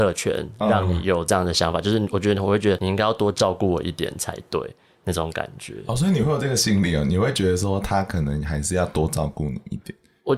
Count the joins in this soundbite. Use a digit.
0